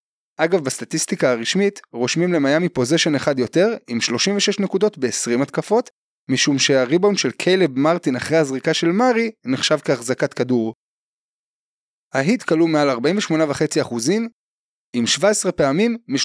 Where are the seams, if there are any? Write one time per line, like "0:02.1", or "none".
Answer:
0:06.1
0:11.9